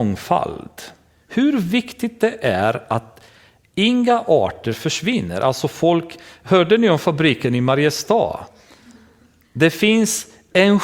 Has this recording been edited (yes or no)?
no